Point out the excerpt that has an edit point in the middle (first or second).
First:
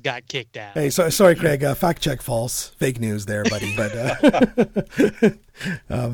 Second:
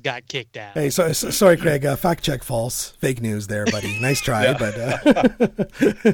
first